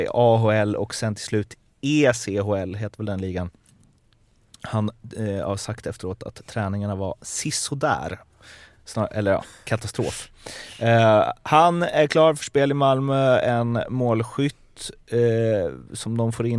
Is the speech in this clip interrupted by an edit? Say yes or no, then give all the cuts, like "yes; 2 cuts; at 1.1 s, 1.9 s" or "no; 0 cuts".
no; 0 cuts